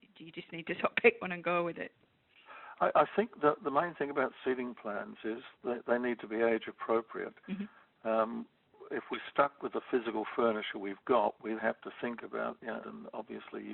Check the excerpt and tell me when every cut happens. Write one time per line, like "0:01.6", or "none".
0:11.6
0:12.8